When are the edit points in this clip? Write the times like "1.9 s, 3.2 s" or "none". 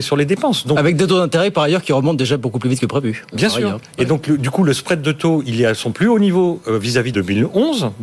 7.1 s